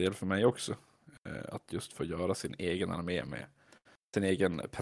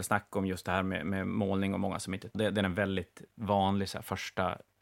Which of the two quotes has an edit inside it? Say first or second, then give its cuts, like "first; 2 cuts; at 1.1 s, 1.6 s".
second; 1 cut; at 2.3 s